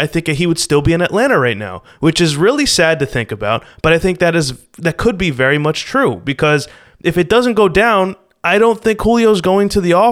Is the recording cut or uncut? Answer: uncut